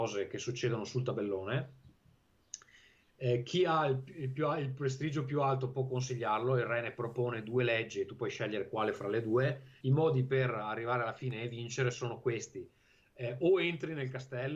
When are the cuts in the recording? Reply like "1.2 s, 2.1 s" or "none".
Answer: 9.8 s